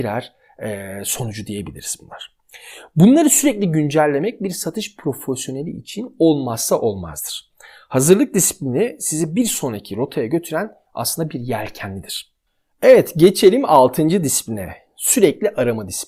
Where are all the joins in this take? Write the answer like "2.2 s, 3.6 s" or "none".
none